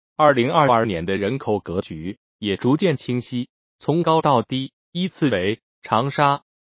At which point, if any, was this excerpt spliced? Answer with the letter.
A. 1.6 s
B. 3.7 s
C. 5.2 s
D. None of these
B